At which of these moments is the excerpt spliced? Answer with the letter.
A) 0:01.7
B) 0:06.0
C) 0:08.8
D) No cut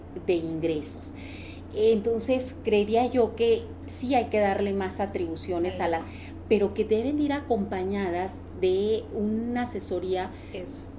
B